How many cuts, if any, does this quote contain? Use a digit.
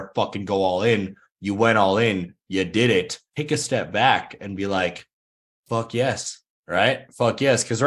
0